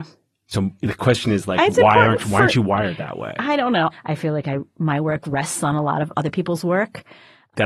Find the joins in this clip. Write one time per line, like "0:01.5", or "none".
0:03.9